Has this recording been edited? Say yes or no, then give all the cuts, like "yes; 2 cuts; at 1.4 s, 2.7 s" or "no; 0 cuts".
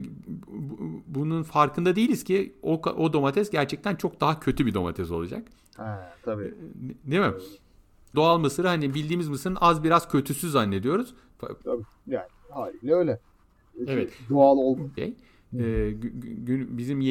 yes; 3 cuts; at 8.1 s, 11.6 s, 15.0 s